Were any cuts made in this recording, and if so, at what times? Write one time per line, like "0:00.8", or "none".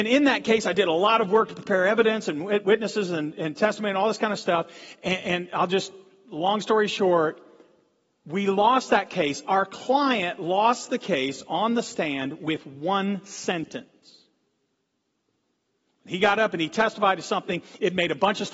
none